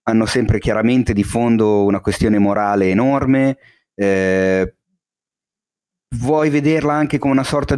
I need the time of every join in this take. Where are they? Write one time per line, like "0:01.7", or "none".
none